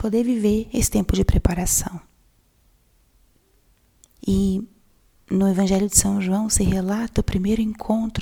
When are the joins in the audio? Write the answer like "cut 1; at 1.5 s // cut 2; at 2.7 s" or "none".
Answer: cut 1; at 4.2 s

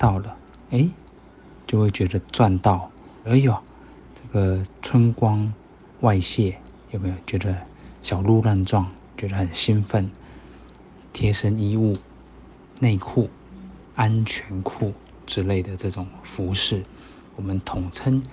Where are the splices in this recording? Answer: cut 1; at 3.2 s // cut 2; at 11.0 s // cut 3; at 13.8 s

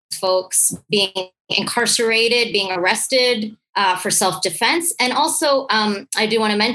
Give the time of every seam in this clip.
none

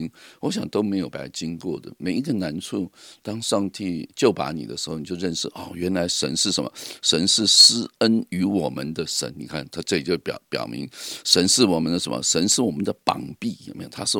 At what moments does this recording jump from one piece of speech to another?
cut 1; at 1.1 s

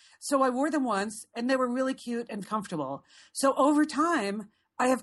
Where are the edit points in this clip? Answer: cut 1; at 2.4 s

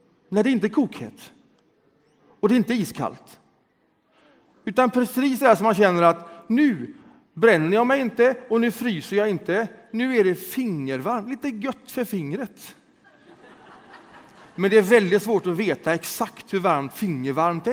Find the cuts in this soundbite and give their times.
none

